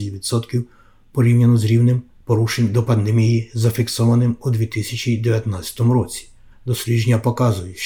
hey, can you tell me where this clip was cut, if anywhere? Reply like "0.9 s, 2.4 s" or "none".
6.5 s

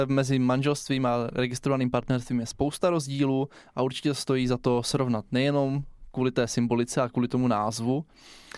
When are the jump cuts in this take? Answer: none

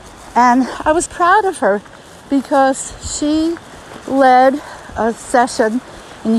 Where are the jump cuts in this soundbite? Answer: 1.1 s

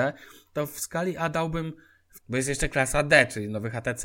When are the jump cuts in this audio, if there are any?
2.2 s

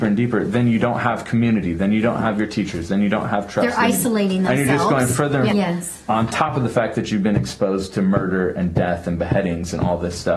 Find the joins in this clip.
5.5 s

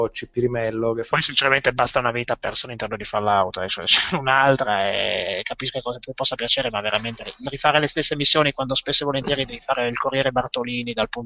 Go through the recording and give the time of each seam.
none

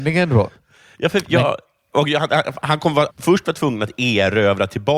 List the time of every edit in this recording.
3.1 s

